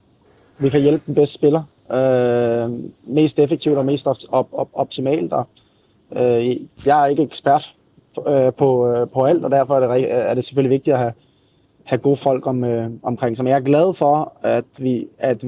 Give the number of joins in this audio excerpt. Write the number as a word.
zero